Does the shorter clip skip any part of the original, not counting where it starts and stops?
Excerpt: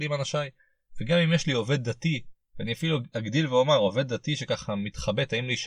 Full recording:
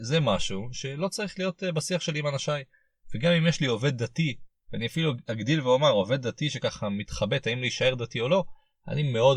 no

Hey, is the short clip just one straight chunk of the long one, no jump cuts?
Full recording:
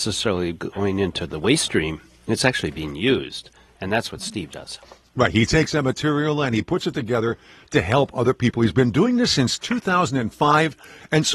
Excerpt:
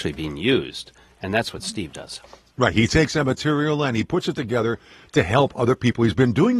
yes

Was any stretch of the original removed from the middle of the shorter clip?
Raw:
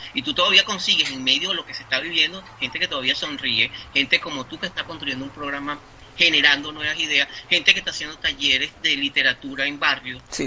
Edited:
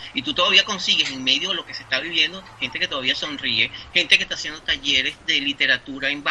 yes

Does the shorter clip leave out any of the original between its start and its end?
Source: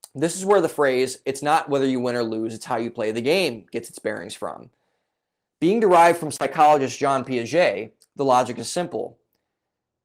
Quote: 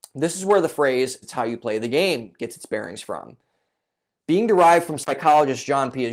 yes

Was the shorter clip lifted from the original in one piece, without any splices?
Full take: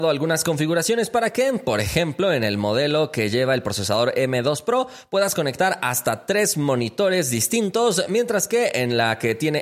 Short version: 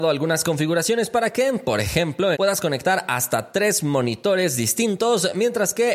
no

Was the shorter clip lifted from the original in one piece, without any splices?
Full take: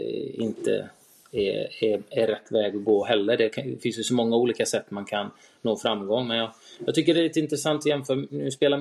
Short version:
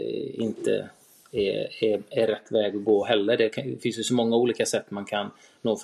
yes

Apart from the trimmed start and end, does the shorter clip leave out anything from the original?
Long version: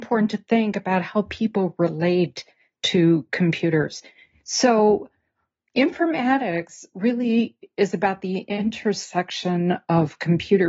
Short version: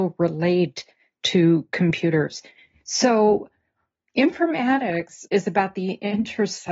yes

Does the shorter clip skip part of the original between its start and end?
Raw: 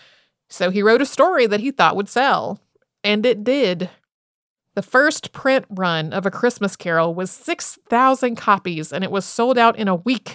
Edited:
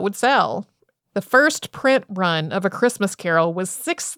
yes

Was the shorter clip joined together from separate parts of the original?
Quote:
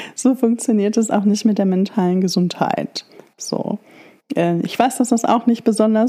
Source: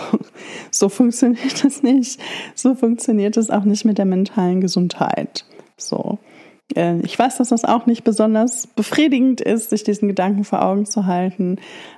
no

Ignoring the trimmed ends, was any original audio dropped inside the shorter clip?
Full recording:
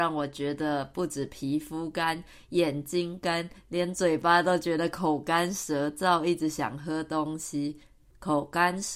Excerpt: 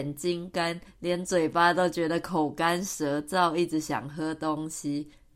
no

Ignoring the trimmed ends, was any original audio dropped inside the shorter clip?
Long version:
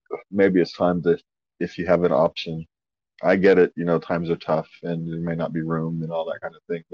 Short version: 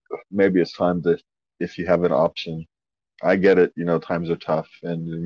no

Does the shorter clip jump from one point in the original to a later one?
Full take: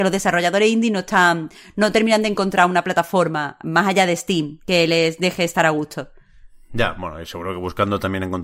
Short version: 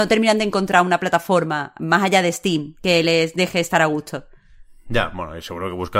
no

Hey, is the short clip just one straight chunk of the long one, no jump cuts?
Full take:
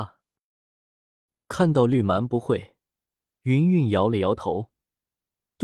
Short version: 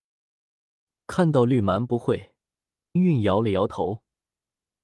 no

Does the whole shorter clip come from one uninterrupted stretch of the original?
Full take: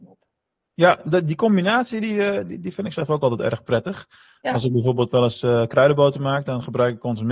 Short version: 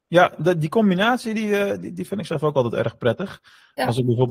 yes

